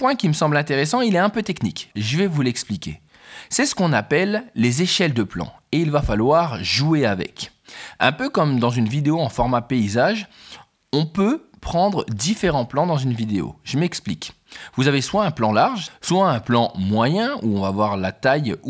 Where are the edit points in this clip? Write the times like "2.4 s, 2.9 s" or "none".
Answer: 1.9 s, 15.9 s